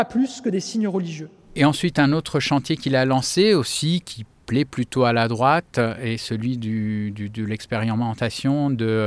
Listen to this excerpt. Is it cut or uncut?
uncut